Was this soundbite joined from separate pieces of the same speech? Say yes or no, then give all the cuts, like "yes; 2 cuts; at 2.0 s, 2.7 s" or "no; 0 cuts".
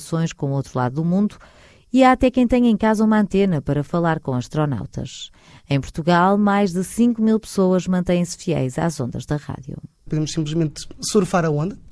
no; 0 cuts